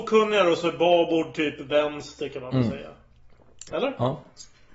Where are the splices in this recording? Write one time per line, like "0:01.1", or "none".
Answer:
0:03.7